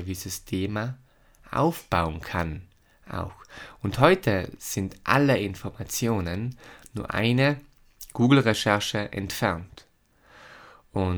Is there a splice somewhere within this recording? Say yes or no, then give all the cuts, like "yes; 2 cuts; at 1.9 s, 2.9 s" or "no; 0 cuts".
no; 0 cuts